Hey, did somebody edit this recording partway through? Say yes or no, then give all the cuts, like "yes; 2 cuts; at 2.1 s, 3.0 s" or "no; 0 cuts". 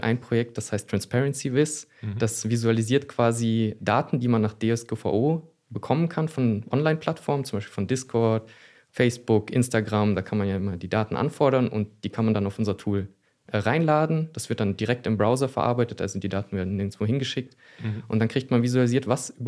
no; 0 cuts